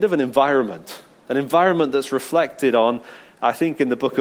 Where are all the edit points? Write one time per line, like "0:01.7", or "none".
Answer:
none